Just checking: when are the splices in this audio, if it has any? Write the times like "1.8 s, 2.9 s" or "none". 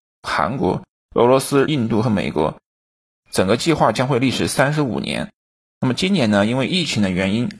1.7 s